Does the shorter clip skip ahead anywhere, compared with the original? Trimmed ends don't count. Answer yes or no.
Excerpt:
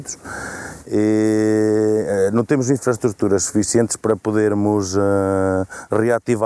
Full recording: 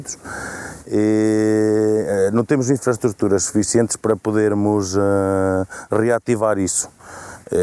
no